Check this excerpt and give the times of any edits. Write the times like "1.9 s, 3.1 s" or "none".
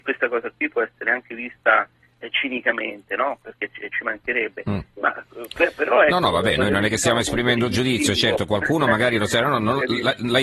none